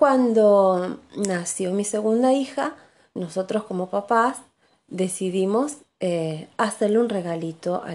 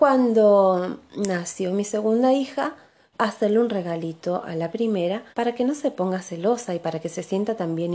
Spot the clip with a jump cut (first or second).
second